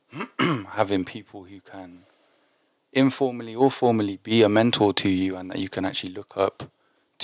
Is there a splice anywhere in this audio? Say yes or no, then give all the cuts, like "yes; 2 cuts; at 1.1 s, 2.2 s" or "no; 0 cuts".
no; 0 cuts